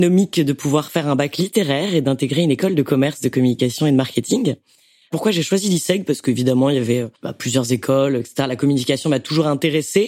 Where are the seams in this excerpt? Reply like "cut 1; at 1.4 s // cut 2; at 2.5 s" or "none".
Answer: cut 1; at 7.2 s